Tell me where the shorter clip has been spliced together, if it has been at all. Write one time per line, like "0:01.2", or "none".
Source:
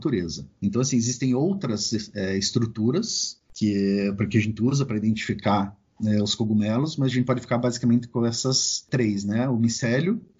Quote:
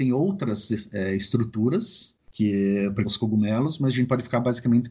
0:03.0